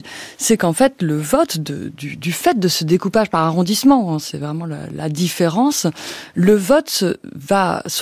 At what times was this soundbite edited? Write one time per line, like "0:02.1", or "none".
none